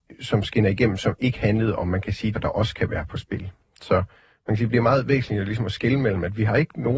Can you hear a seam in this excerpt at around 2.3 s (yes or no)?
yes